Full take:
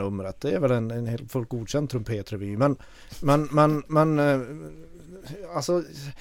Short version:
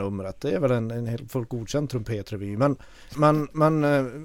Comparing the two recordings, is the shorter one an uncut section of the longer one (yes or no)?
no